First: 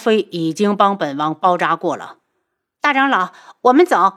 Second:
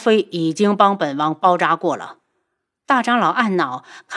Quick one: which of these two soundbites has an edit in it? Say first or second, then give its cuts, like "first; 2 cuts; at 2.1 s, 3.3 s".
first; 1 cut; at 2.8 s